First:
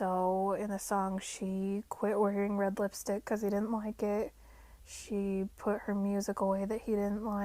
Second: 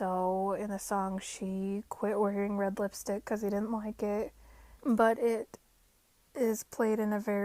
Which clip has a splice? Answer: second; 1 cut; at 4.8 s

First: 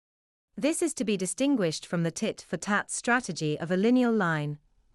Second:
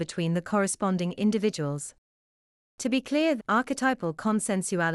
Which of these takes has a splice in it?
second; 1 cut; at 3.4 s

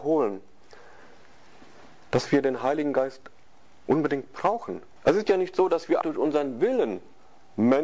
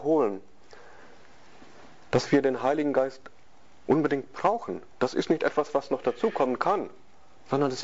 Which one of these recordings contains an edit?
first; 2 cuts; at 5.0 s, 6.0 s

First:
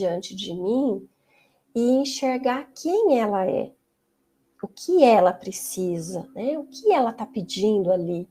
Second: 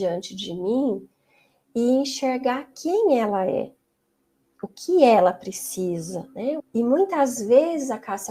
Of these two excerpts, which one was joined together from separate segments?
second; 1 cut; at 6.6 s

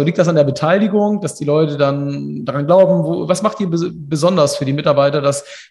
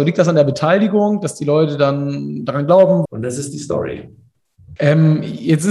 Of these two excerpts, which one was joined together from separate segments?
second; 2 cuts; at 3.1 s, 4.8 s

